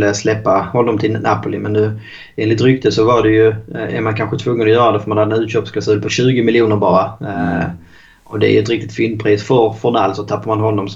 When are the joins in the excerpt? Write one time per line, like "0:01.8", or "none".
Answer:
none